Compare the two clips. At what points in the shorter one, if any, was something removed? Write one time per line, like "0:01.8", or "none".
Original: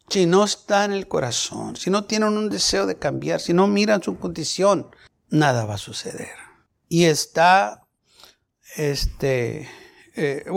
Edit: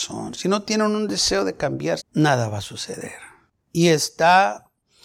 0:02.0